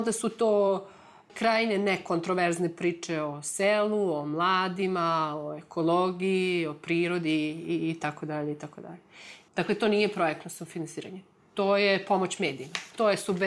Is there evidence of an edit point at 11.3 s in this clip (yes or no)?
no